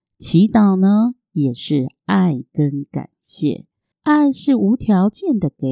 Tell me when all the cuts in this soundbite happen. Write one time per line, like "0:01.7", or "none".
0:03.9